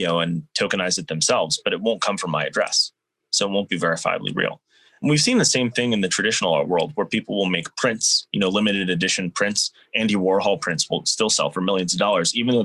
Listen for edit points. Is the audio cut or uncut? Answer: uncut